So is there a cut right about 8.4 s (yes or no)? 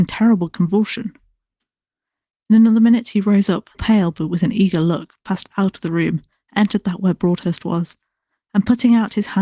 no